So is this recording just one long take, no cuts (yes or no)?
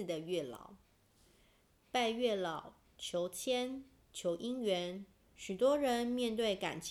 no